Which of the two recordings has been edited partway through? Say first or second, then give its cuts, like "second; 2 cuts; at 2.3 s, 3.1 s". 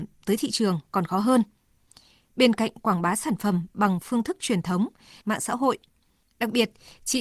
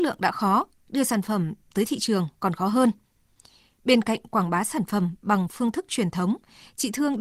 first; 1 cut; at 5.2 s